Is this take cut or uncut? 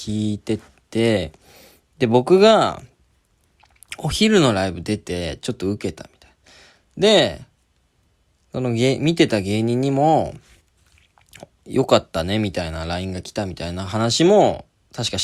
uncut